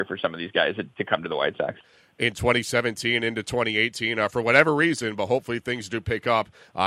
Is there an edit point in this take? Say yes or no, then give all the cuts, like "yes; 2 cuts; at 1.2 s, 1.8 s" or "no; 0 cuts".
yes; 1 cut; at 1.8 s